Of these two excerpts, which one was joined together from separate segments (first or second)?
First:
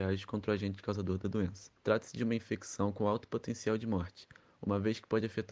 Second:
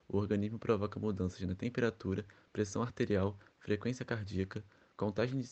first